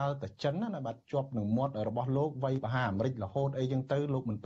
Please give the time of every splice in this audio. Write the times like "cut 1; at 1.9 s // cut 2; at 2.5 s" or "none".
none